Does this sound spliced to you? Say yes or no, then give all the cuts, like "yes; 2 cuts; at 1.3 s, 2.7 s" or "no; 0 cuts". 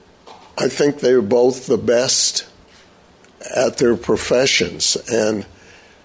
no; 0 cuts